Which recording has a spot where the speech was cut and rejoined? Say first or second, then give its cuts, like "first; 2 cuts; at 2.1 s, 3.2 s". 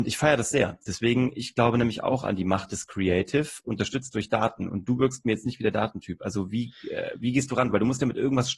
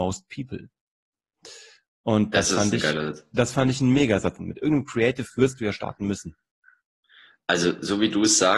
second; 1 cut; at 4.4 s